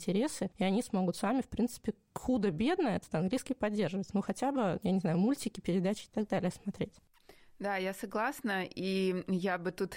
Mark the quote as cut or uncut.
uncut